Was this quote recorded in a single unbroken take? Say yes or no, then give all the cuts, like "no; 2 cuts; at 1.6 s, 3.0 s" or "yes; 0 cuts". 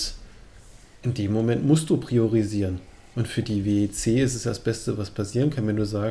yes; 0 cuts